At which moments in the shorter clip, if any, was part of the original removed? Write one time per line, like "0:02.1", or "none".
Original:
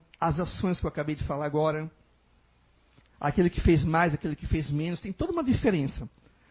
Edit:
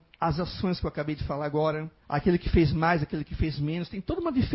0:02.0